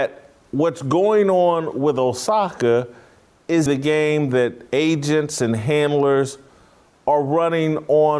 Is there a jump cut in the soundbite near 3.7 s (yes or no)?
yes